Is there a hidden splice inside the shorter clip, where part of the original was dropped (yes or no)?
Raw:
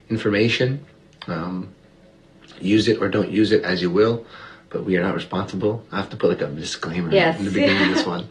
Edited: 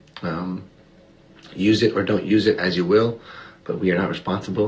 no